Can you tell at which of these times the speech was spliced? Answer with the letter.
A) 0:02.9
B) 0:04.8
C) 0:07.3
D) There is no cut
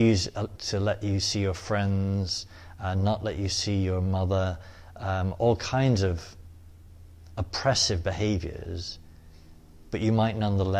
D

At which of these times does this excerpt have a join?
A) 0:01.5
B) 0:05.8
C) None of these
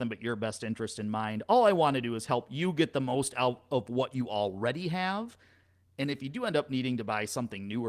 C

